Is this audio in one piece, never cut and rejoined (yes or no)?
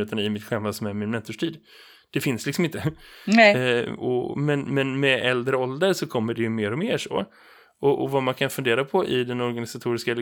yes